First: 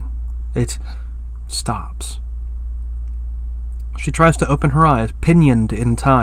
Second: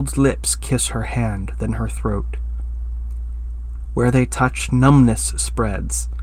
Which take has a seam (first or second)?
first